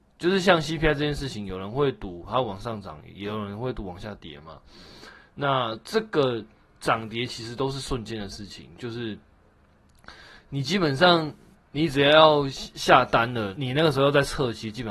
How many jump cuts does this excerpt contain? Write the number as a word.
one